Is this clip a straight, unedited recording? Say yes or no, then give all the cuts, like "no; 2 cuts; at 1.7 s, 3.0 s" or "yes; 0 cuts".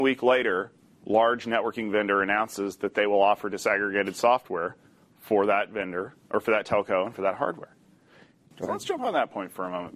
no; 1 cut; at 8.5 s